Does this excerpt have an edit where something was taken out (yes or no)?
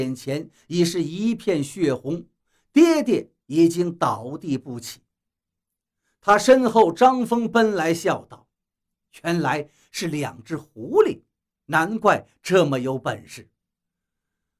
no